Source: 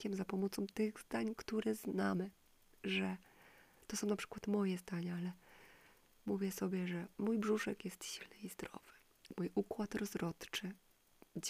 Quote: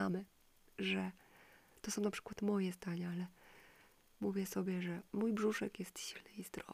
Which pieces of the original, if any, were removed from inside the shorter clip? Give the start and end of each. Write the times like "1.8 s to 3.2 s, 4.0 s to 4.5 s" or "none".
none